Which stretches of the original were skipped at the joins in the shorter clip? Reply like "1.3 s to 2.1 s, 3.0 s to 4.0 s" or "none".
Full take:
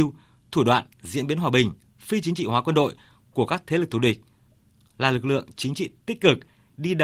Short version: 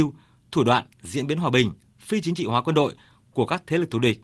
none